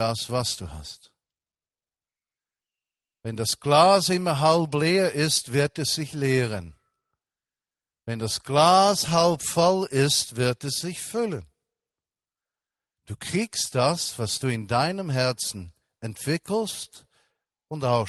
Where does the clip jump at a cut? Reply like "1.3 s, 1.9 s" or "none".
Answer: none